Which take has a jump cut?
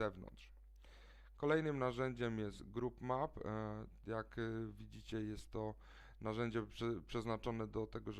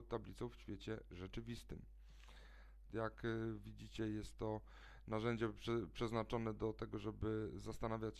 second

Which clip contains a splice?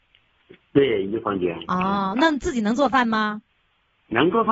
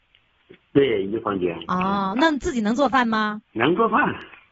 second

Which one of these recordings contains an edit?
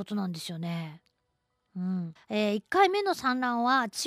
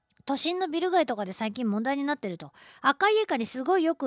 first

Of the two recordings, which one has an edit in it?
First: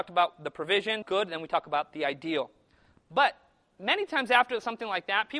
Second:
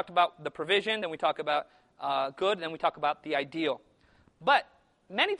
first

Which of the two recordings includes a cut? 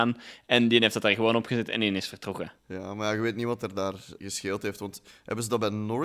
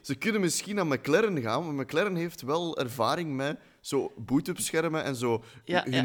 first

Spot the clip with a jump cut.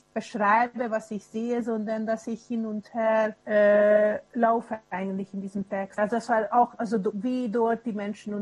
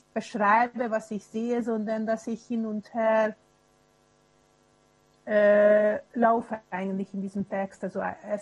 first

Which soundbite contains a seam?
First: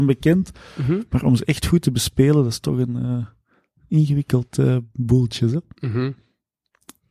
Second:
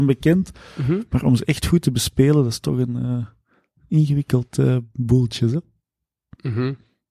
first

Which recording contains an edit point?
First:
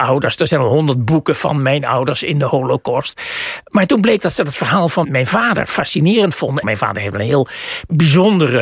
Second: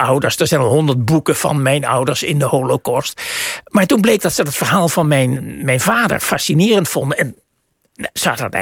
first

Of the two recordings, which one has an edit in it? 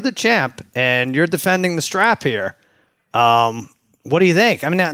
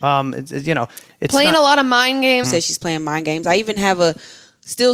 second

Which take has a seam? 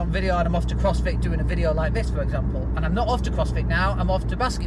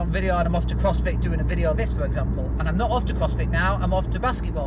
second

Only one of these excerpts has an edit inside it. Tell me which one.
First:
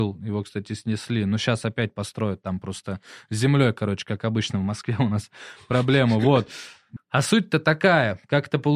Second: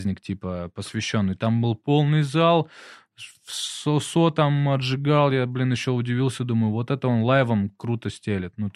first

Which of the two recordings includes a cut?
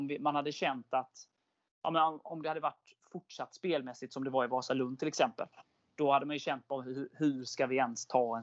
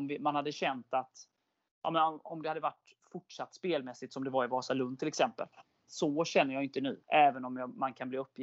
second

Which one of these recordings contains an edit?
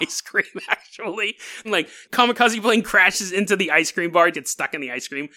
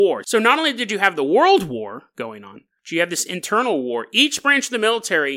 first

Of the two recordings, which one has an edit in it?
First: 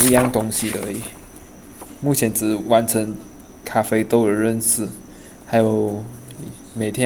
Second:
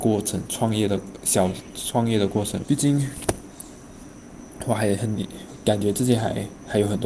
second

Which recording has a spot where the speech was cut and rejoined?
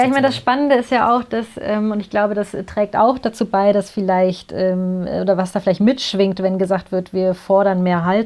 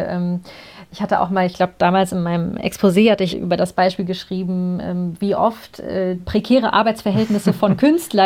second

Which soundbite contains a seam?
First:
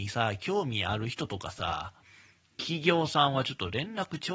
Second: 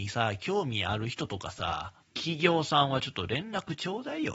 second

